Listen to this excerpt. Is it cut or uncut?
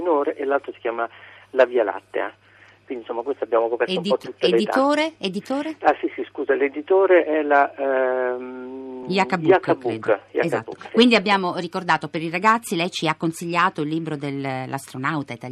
uncut